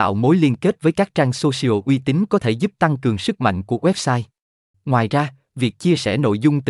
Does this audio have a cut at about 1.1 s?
no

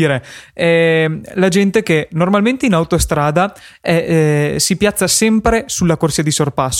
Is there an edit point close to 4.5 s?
no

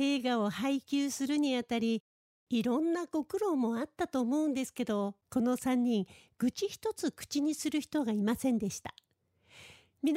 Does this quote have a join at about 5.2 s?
yes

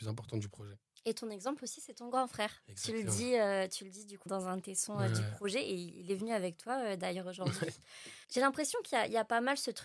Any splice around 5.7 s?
no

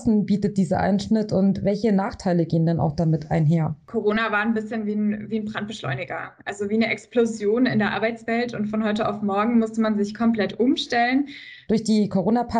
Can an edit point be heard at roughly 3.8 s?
no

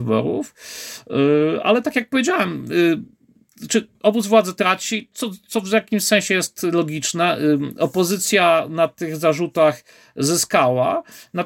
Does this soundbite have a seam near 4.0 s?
yes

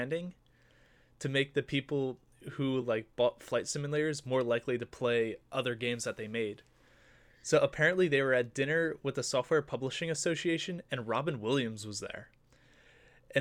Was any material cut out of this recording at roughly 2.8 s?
no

